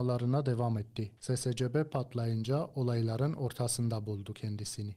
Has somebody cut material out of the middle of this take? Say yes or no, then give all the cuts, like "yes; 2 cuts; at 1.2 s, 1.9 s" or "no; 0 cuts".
yes; 1 cut; at 1.2 s